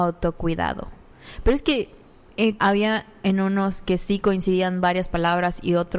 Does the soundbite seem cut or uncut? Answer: cut